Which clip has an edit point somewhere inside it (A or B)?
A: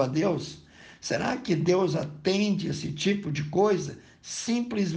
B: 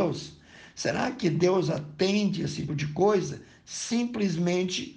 B